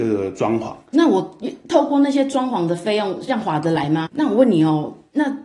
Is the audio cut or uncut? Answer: cut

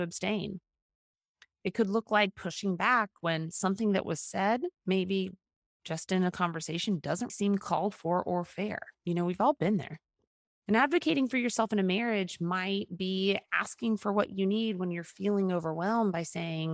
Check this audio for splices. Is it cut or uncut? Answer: cut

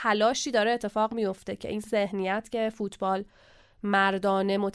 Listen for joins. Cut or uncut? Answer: uncut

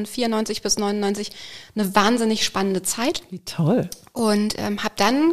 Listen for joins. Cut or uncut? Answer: uncut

